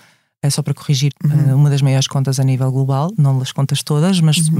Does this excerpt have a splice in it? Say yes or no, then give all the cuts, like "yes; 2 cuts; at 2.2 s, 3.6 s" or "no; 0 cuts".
yes; 1 cut; at 1.1 s